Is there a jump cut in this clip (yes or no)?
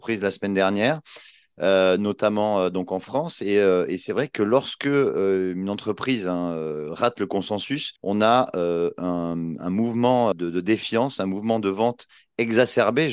yes